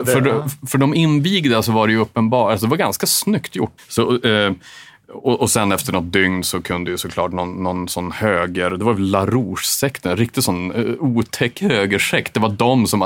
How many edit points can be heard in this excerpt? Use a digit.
1